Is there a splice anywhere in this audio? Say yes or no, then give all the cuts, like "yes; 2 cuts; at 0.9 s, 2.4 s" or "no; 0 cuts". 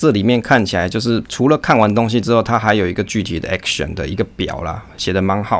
no; 0 cuts